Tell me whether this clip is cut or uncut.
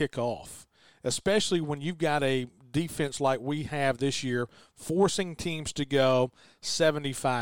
uncut